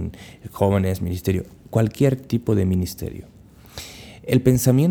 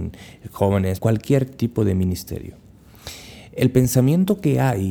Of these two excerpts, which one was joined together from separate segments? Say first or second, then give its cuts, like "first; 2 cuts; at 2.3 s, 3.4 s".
second; 1 cut; at 1.0 s